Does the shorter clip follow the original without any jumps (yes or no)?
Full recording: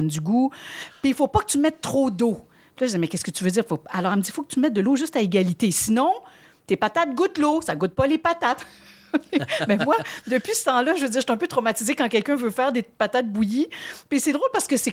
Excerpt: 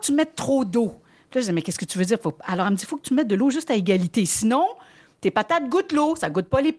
yes